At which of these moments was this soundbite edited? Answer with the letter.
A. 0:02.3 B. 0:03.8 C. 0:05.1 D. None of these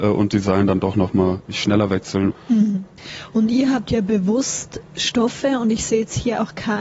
A